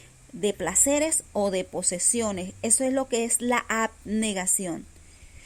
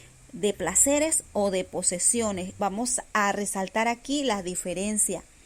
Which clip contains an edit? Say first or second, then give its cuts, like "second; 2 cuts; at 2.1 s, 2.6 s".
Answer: second; 1 cut; at 2.6 s